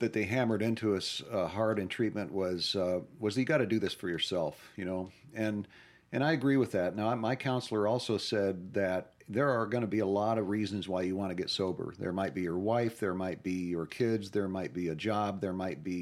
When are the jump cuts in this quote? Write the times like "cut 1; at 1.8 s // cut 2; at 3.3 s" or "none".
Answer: none